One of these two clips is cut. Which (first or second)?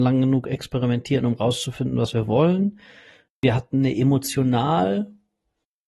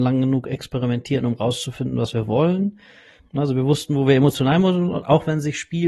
second